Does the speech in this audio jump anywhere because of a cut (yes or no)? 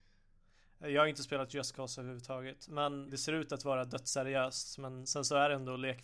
yes